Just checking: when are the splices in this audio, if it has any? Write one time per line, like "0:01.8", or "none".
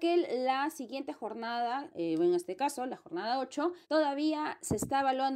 0:01.9
0:03.8